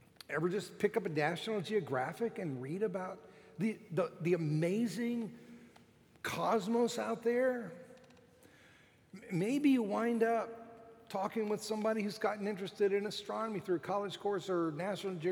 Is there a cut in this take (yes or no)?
no